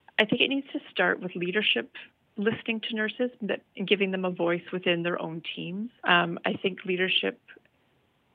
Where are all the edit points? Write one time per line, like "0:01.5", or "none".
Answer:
0:06.0